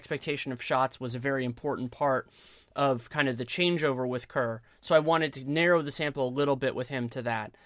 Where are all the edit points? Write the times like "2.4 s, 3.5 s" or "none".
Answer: none

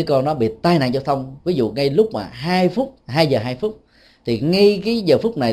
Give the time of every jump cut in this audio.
3.0 s

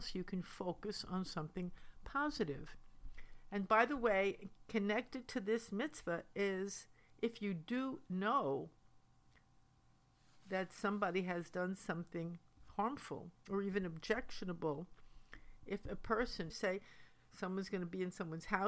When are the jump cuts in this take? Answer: 16.5 s

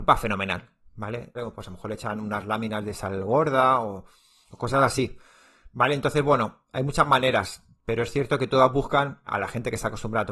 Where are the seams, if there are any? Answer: 1.3 s, 9.3 s

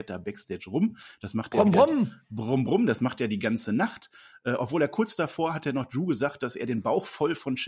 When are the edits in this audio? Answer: none

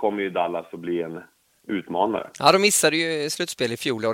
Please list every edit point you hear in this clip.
none

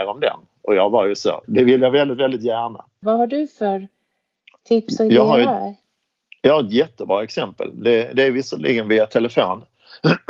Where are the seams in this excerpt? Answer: 1.4 s, 3.0 s

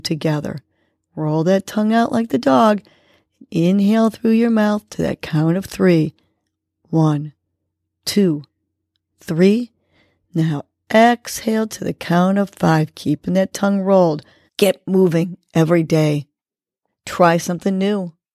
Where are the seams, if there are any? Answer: 14.5 s, 16.9 s

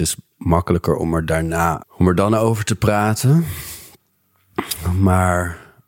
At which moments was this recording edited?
1.8 s

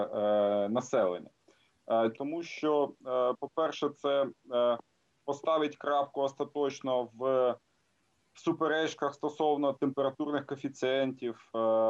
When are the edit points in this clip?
2.1 s

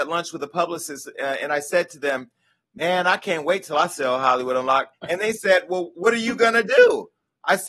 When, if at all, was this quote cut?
4.9 s

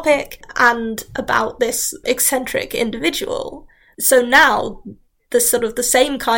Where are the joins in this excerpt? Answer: none

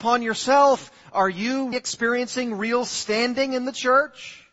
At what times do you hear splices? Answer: 1.7 s

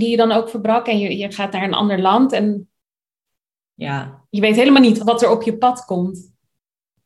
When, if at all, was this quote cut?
5.0 s

